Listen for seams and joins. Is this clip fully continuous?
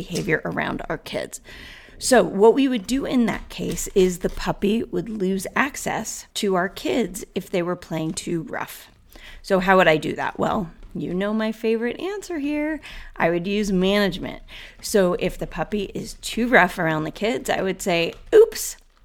no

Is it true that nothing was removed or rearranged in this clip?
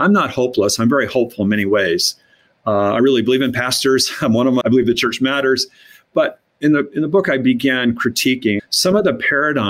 no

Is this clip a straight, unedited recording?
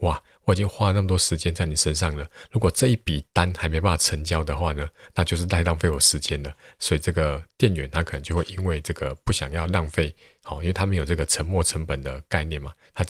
yes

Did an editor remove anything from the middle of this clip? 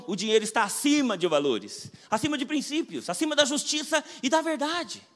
no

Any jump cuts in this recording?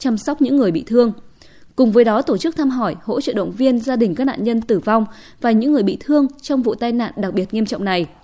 no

